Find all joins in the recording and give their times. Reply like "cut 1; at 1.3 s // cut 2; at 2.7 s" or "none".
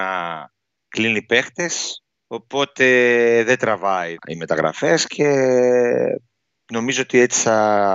cut 1; at 4.2 s